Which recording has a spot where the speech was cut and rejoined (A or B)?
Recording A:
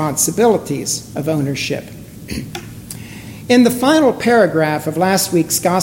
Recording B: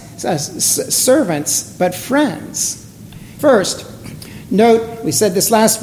B